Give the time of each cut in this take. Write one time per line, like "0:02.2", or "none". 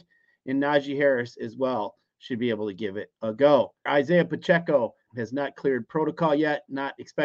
0:03.9
0:05.1